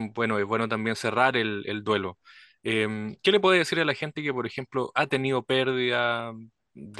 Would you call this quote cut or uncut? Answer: uncut